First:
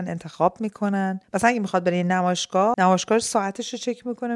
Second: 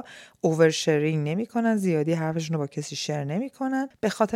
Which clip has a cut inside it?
first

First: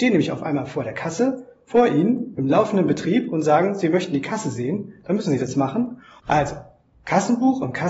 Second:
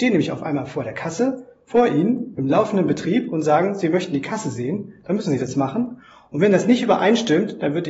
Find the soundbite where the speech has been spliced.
first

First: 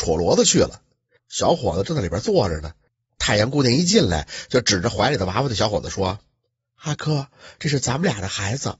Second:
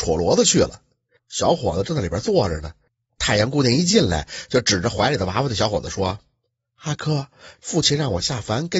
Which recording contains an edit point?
second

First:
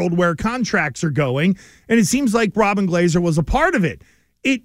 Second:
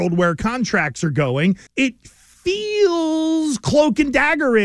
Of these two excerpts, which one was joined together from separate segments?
second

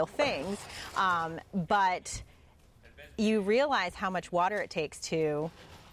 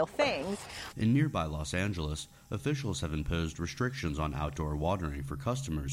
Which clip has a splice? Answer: second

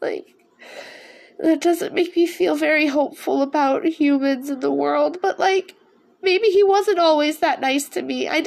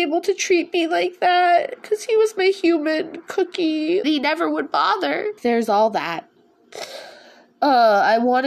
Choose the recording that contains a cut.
second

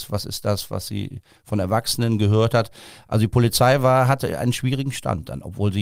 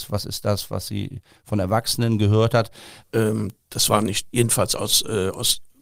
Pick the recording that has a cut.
second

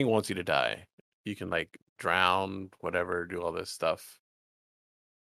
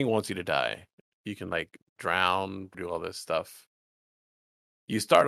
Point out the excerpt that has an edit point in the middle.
second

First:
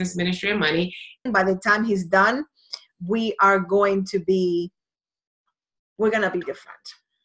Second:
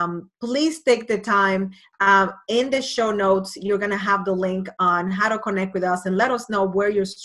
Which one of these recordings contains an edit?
first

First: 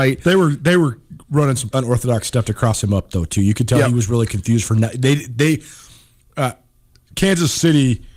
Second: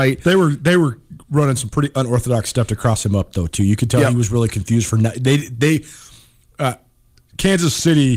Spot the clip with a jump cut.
first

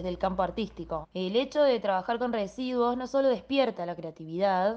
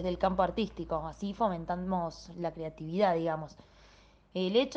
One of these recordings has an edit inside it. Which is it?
first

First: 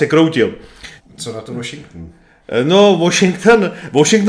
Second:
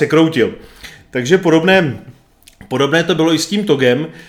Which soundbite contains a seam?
first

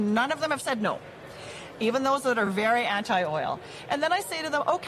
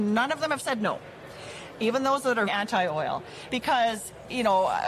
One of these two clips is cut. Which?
second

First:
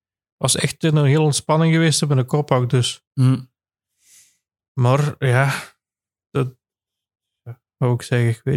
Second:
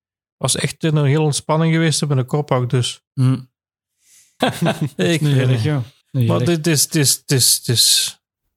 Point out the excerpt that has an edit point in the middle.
second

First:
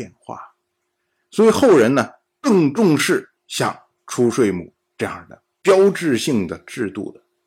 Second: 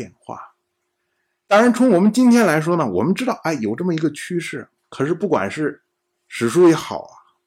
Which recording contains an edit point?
first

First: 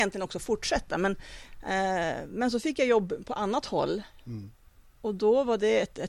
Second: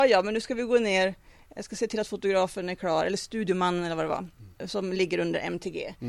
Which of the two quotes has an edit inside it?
second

